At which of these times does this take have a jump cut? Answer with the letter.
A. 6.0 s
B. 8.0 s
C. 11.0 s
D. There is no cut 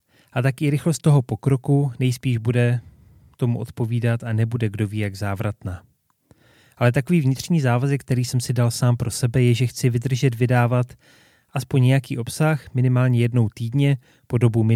D